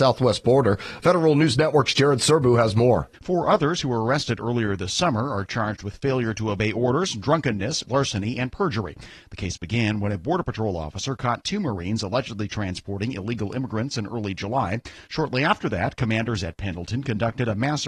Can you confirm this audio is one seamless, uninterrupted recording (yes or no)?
no